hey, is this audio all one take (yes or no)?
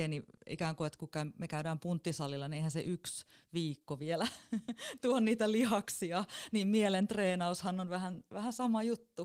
yes